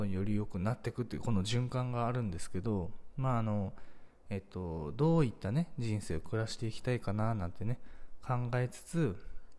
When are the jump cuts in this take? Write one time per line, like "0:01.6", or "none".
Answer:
0:04.3